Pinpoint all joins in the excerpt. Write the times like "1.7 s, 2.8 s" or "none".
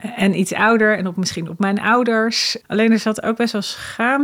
2.6 s